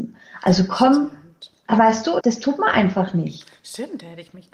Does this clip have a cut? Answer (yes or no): yes